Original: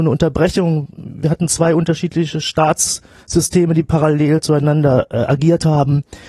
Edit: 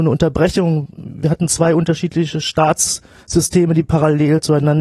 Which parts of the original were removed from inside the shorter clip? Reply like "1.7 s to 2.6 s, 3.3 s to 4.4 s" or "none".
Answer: none